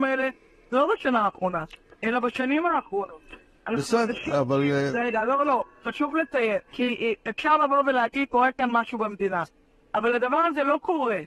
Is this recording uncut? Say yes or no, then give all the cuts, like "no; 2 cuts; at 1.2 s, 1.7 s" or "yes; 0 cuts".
no; 3 cuts; at 4.3 s, 6.7 s, 8.3 s